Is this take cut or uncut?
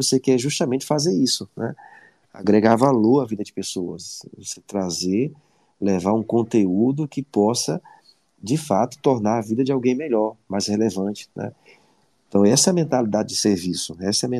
uncut